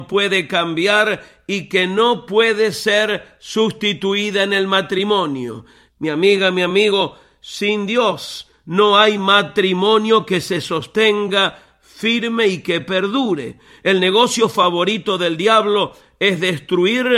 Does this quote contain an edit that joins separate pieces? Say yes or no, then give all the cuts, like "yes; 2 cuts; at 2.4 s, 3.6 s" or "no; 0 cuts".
yes; 1 cut; at 5.9 s